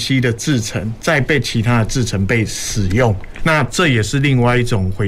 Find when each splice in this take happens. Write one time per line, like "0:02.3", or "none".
0:03.4